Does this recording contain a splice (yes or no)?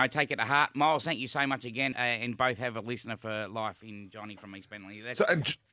yes